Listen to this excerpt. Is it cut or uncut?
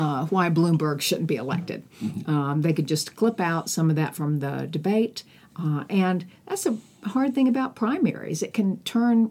uncut